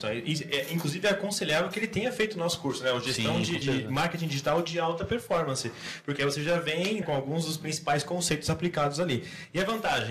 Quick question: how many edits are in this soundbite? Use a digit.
2